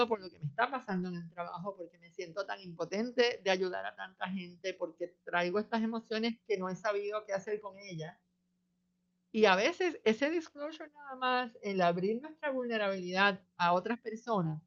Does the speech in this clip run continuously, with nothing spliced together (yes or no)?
yes